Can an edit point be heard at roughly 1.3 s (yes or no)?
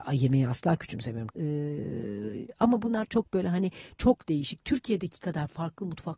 yes